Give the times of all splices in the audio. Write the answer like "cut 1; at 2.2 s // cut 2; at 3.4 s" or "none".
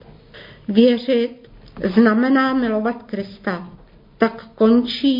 none